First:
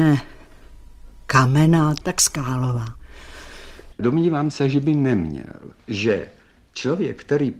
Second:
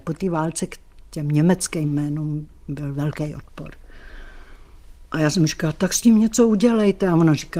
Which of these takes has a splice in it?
first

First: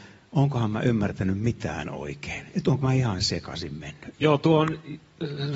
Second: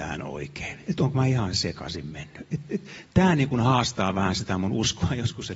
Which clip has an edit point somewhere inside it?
first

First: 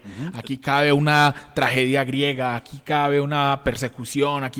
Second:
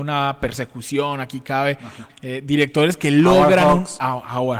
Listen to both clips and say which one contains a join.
second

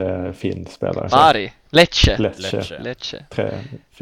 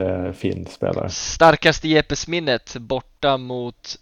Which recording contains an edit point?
first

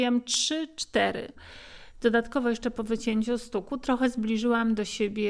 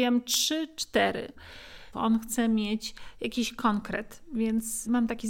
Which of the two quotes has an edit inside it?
second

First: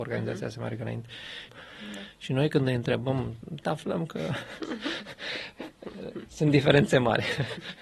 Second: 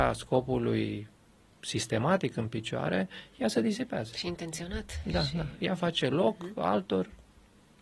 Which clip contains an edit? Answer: first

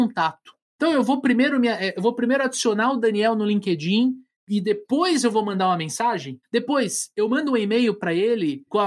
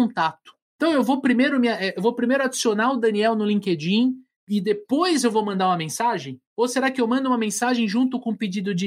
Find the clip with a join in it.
first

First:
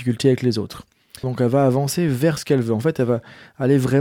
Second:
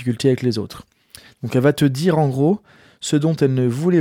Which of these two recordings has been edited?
first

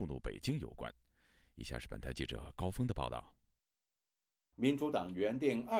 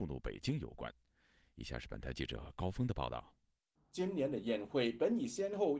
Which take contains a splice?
second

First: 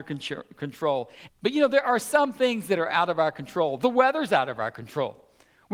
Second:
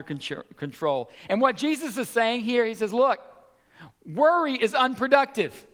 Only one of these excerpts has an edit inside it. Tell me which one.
first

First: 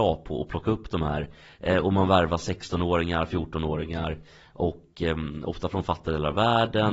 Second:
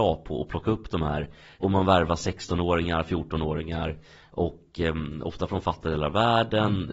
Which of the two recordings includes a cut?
second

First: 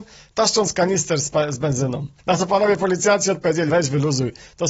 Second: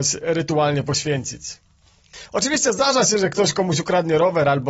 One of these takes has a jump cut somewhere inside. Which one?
first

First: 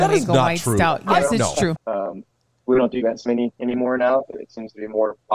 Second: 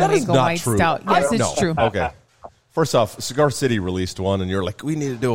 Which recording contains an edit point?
first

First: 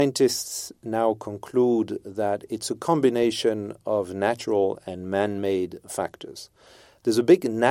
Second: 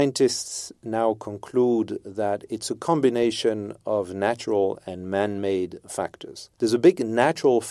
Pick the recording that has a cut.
second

